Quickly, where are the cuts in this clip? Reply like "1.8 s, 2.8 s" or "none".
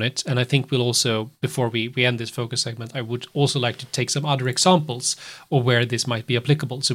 none